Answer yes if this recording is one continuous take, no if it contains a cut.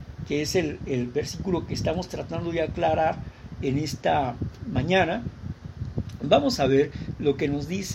yes